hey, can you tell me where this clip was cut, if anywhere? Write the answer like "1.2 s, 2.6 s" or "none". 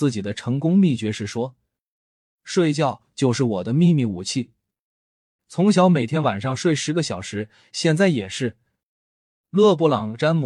none